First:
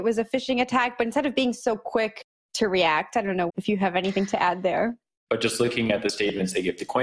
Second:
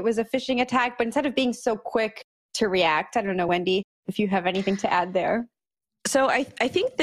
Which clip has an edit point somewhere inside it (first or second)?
first